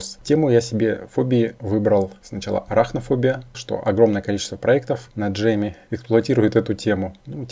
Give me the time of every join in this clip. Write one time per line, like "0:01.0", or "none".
0:03.5